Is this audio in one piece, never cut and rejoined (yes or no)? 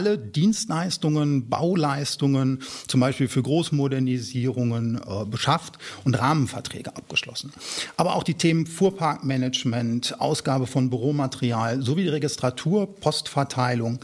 yes